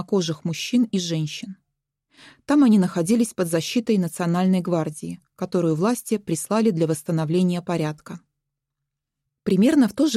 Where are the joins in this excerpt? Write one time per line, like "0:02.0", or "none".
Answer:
none